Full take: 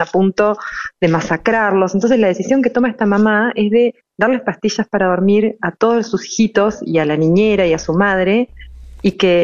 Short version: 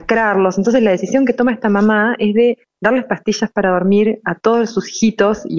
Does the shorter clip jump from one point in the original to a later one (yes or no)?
no